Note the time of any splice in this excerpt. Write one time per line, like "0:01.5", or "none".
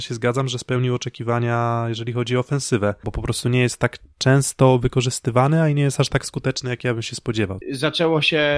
0:03.0
0:07.6